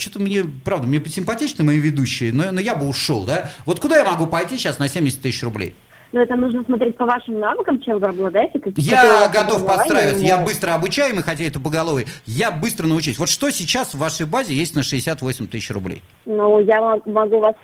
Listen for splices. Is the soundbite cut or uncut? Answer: uncut